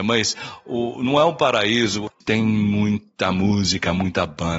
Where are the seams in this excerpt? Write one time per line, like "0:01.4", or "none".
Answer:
0:02.1

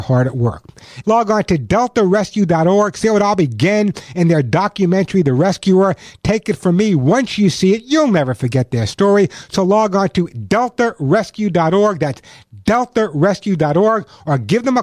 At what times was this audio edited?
0:01.0

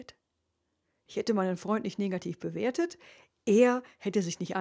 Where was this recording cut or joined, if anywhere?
none

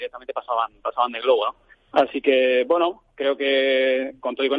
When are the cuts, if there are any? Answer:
0:01.7

